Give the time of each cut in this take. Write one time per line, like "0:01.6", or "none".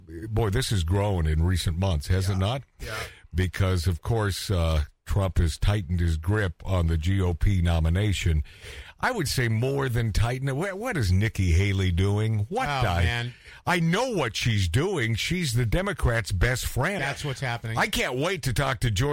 0:17.0